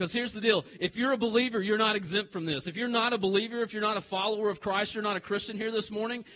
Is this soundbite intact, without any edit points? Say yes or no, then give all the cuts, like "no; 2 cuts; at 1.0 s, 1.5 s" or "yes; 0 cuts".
yes; 0 cuts